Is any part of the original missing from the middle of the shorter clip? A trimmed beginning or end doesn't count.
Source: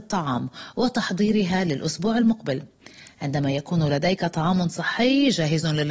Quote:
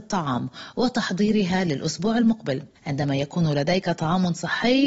yes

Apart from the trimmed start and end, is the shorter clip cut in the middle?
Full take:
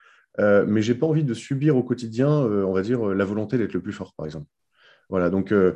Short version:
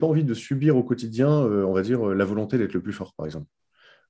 no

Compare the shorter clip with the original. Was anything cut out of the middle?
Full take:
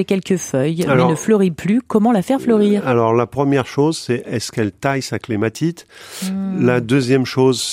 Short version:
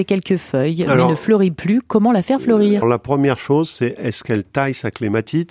yes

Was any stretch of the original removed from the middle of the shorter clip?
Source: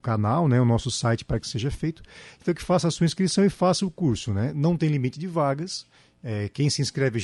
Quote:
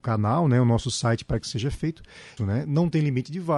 yes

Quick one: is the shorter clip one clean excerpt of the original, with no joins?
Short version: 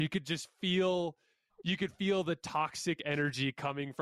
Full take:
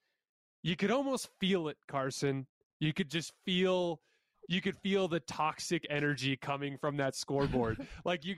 yes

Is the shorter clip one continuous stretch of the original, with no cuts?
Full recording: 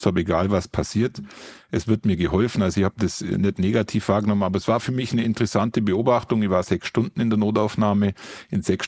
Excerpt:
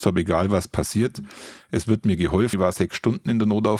no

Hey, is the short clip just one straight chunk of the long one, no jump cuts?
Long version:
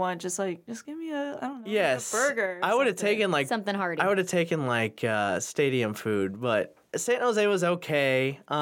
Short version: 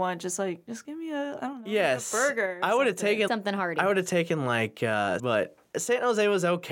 no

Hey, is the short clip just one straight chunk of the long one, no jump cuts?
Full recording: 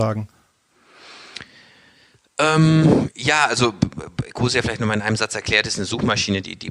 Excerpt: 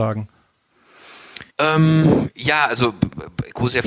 no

